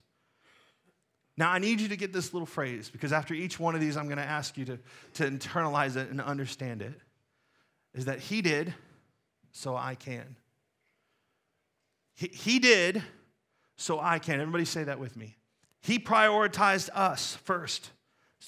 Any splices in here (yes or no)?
yes